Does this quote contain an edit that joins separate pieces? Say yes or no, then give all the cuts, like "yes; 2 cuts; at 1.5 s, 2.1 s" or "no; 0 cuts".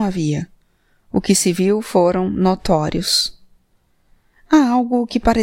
no; 0 cuts